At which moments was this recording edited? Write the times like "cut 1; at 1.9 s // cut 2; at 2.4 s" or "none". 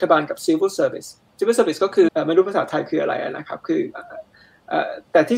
cut 1; at 2.1 s